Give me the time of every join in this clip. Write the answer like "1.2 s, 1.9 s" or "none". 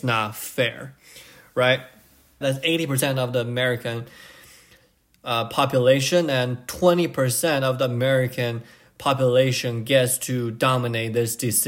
2.4 s